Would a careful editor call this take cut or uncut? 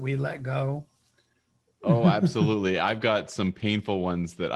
uncut